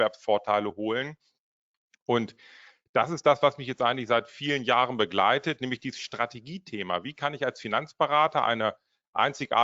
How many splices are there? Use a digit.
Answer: 0